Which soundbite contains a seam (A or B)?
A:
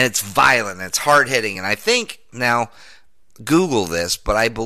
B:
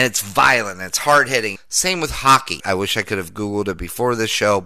B